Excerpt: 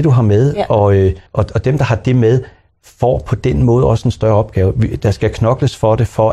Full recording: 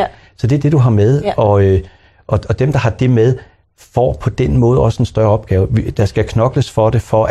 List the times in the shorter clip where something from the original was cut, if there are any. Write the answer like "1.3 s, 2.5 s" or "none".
1.3 s